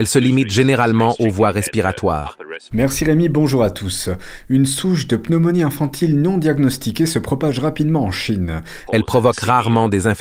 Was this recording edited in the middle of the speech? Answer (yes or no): yes